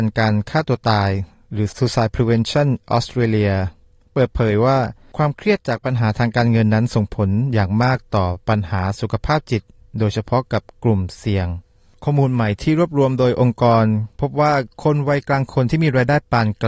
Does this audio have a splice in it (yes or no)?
no